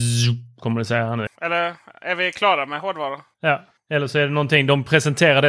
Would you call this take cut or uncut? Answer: cut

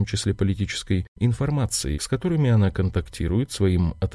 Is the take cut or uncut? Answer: cut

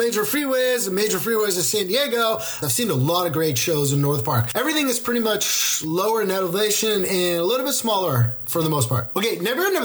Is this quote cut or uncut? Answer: cut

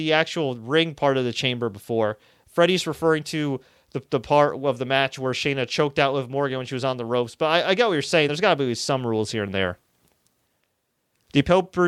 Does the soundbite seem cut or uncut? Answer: uncut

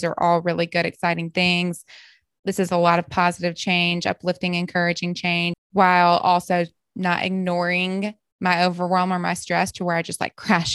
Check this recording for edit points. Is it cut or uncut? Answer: cut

